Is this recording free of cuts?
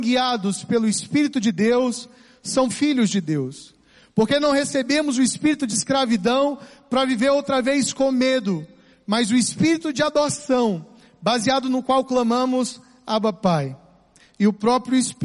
yes; 0 cuts

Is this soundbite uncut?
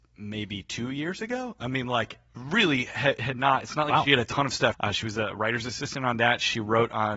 no; 1 cut; at 4.7 s

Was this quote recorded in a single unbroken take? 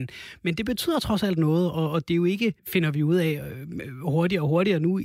no; 1 cut; at 2.6 s

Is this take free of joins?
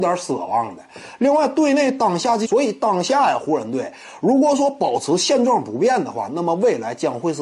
no; 1 cut; at 2.4 s

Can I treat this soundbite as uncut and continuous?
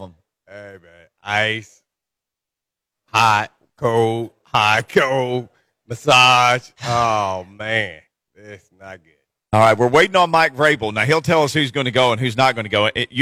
yes; 0 cuts

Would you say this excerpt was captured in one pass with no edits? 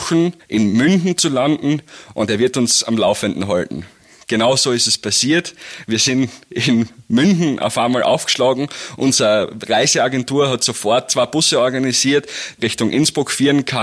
no; 1 cut; at 12.6 s

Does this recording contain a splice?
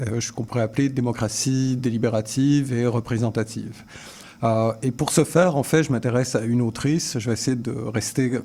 no; 0 cuts

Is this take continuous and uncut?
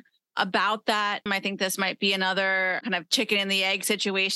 no; 1 cut; at 1.3 s

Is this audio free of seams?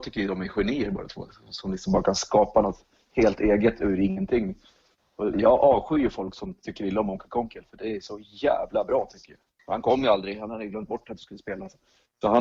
no; 2 cuts; at 5.3 s, 9.6 s

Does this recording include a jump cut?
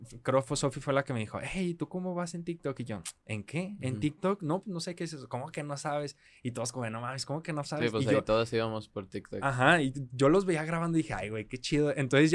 no; 0 cuts

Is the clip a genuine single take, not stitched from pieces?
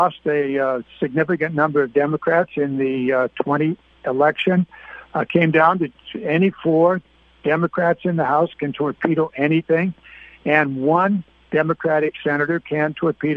yes; 0 cuts

